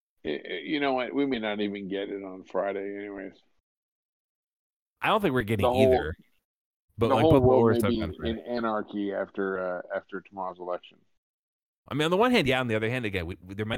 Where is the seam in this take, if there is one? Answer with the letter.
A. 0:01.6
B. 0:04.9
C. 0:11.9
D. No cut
C